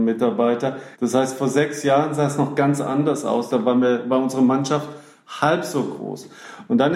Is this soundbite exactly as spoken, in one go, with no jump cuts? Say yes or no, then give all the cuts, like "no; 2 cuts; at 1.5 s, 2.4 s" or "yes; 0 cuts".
no; 1 cut; at 0.9 s